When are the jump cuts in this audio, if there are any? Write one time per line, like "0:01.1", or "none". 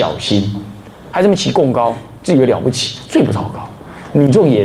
0:01.1